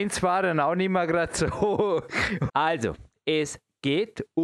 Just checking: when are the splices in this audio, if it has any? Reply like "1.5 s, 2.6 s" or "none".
2.5 s